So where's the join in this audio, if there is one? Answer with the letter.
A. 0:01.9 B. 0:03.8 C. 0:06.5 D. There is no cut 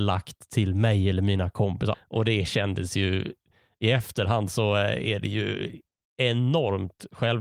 A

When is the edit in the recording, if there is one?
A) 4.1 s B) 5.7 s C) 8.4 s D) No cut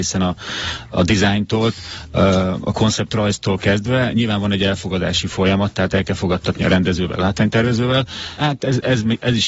C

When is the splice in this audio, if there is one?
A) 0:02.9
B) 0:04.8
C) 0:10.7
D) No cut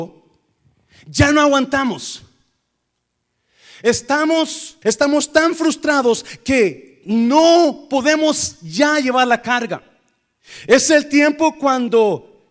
B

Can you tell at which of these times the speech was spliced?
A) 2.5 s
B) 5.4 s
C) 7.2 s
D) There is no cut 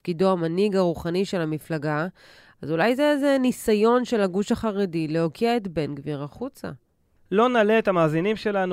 C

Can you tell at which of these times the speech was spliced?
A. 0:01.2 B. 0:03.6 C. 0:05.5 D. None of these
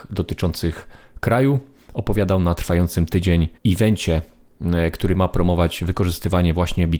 B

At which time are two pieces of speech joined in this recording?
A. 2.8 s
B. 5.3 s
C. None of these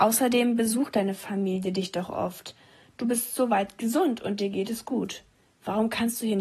C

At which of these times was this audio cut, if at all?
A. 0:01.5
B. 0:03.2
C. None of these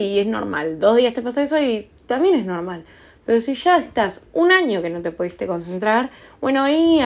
C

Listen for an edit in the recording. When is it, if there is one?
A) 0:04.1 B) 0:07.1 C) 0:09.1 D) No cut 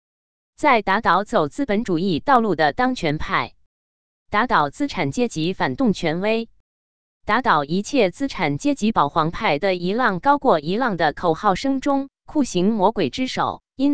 D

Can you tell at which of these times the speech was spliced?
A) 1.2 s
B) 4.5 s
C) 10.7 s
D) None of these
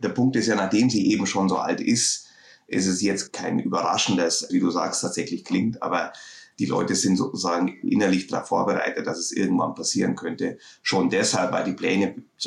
B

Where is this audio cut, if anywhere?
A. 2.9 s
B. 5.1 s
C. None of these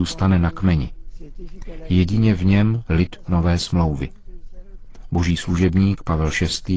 A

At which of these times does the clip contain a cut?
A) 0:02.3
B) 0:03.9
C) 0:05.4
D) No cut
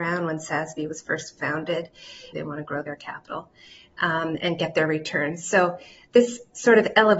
A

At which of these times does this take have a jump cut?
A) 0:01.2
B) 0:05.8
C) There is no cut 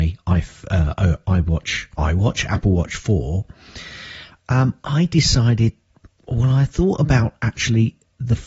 C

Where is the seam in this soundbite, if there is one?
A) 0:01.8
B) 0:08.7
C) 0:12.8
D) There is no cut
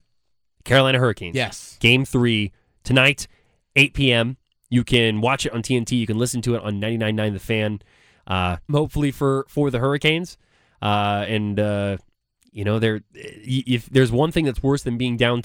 B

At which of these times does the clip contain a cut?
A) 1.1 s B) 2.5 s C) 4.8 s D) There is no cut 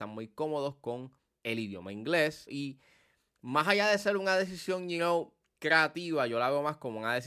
B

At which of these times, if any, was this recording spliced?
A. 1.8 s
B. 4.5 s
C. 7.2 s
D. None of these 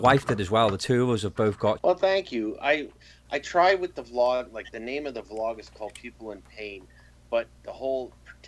A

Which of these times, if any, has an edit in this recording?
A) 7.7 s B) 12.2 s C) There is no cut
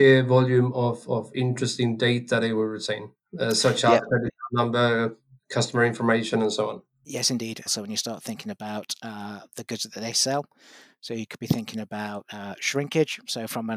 A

